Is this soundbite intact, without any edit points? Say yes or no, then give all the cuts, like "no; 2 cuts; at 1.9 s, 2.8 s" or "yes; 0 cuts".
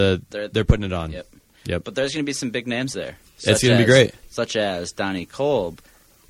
yes; 0 cuts